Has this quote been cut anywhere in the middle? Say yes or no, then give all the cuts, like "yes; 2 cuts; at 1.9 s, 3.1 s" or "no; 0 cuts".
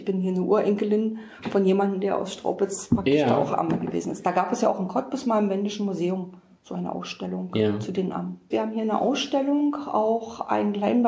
yes; 1 cut; at 8.5 s